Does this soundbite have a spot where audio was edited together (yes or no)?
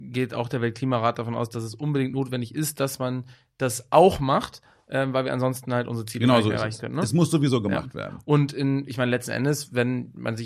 no